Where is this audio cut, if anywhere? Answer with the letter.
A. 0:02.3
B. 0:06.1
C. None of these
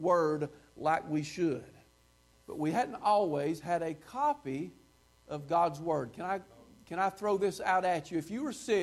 A